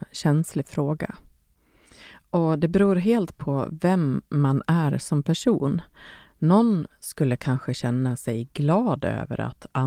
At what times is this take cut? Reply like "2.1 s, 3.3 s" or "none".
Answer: none